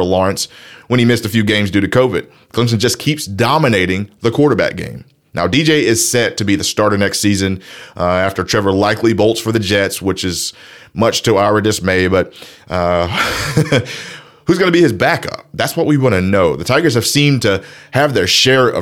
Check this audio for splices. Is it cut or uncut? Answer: uncut